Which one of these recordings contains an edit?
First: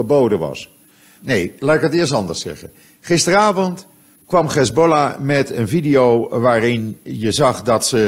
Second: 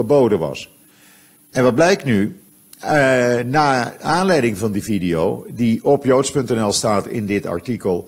first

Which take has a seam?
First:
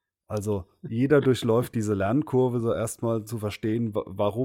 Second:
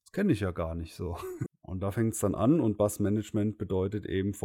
second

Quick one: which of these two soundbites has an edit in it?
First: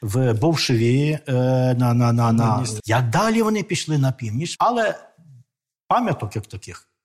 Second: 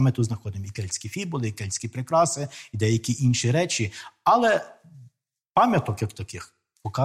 first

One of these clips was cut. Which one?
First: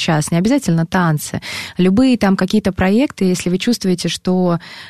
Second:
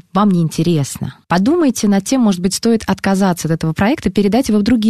second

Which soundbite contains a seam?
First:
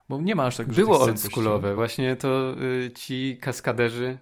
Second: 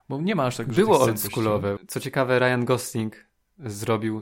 second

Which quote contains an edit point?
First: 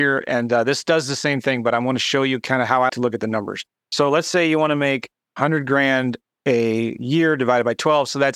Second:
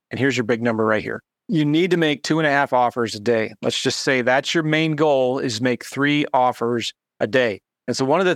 first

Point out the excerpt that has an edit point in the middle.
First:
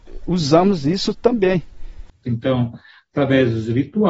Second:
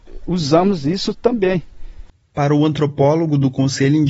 first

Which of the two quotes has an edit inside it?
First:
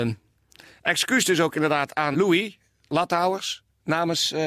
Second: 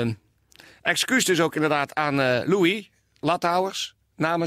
first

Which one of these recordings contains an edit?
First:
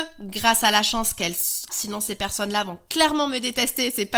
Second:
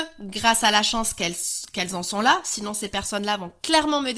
first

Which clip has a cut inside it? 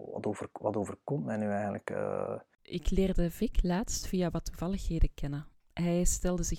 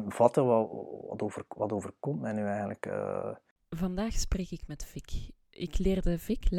first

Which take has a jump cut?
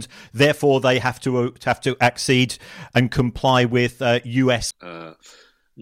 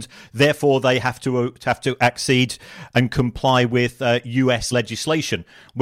first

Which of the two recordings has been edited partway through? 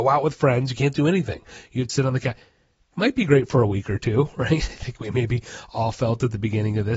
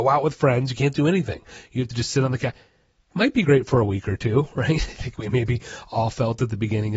first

